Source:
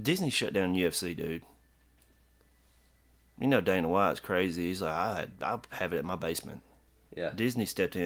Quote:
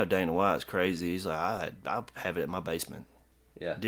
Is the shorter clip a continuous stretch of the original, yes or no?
yes